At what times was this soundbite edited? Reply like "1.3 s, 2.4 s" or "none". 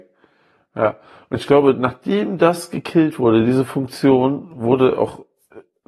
none